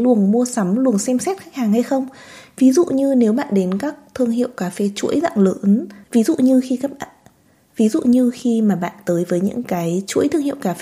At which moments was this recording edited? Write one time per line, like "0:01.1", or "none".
0:06.0